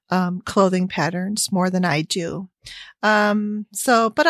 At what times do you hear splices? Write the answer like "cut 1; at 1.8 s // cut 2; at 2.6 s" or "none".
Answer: none